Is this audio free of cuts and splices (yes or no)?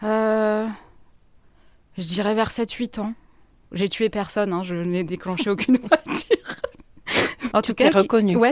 no